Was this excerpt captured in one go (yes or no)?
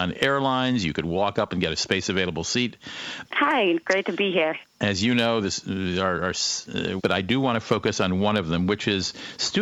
no